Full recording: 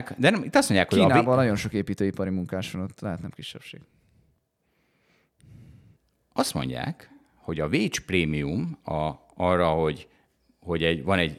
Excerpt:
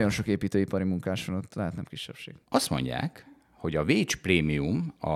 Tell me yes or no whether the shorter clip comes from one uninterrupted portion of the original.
no